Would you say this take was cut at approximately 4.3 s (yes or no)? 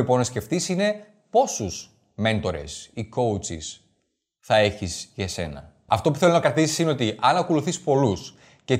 no